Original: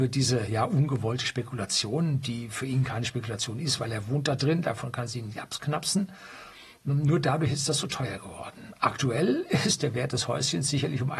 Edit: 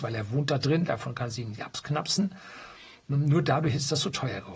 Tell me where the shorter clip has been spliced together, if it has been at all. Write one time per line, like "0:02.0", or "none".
none